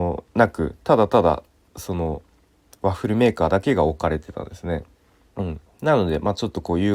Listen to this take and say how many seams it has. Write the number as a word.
one